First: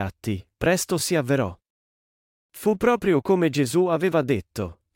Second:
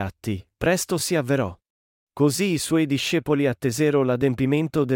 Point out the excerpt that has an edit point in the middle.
second; 1 cut; at 2.1 s

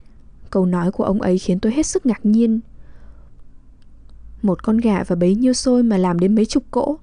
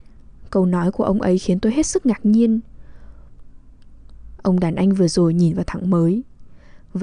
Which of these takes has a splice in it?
second; 1 cut; at 4.4 s

